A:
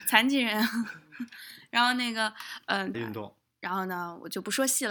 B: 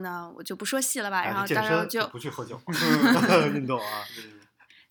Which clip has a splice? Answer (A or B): A